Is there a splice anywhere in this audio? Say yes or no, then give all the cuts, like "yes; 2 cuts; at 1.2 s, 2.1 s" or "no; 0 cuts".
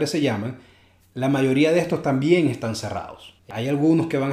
no; 0 cuts